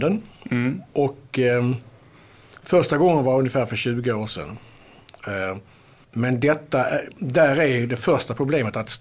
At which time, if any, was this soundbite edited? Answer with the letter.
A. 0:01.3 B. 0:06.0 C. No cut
B